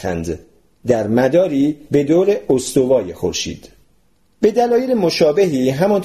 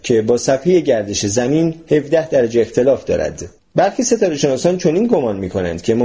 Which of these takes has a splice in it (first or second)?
second